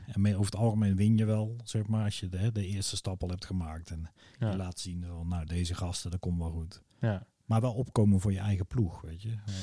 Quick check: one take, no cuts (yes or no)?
yes